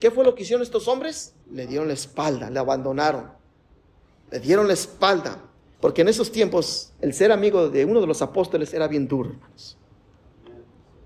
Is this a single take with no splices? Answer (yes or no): no